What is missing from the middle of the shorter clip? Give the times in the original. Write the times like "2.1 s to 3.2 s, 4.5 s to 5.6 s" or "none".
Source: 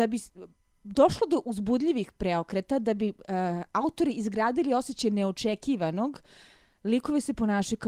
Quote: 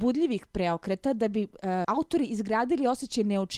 3.5 s to 3.7 s